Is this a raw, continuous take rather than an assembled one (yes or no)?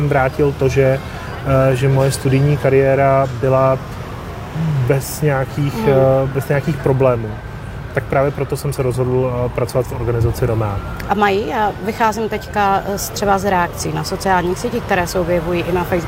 yes